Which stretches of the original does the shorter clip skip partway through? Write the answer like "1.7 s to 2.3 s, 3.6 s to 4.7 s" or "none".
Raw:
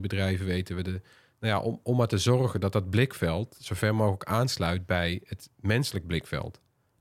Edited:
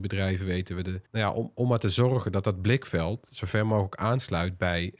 1.1 s to 1.3 s